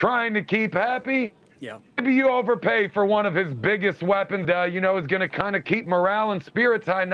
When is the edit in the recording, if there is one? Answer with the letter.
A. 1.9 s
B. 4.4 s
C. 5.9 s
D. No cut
B